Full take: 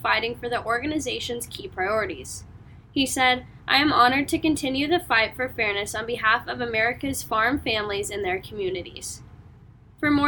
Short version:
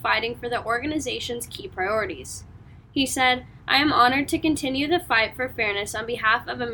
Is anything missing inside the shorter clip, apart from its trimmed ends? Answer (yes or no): no